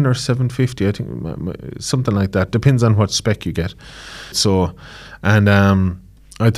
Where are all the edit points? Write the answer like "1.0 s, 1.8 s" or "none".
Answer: 4.3 s